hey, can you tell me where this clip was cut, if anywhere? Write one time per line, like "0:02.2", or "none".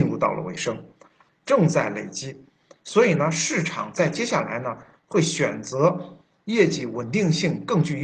0:01.3